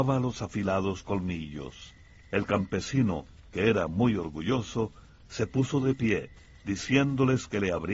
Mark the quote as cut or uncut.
uncut